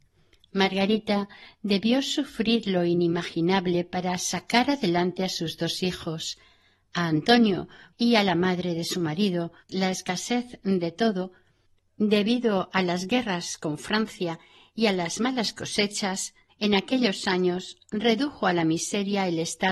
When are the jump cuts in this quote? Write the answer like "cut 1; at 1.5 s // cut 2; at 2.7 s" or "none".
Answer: cut 1; at 7.9 s // cut 2; at 9.7 s